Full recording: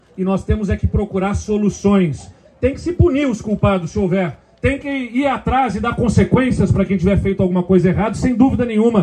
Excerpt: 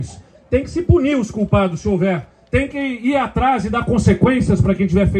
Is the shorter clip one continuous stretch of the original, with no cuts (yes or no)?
yes